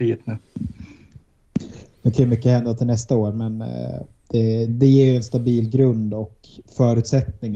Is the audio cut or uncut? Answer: cut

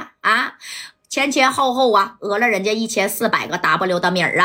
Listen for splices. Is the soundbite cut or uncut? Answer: uncut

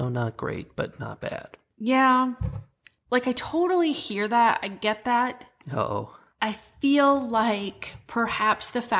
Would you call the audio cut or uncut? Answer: uncut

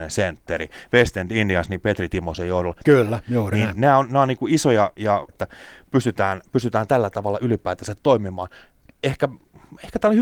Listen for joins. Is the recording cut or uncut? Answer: cut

